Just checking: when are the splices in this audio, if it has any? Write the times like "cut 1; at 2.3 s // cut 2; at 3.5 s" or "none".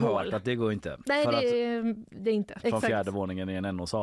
cut 1; at 1.0 s // cut 2; at 2.6 s